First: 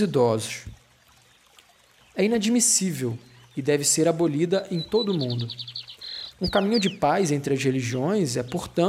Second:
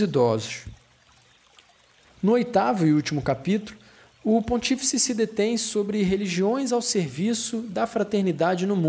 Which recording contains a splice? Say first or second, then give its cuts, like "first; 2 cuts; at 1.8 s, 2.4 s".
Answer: first; 2 cuts; at 2.0 s, 6.3 s